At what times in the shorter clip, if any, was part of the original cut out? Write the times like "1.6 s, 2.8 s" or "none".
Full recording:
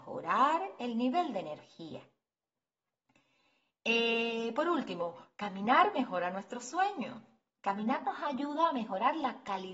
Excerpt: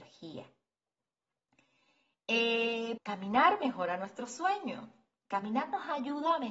3.0 s